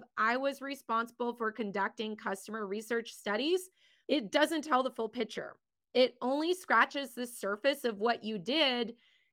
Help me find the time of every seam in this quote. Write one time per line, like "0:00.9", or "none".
none

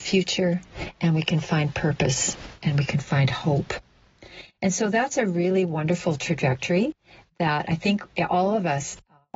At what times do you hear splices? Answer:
none

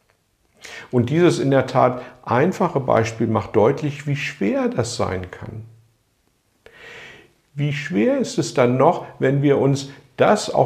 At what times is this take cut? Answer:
none

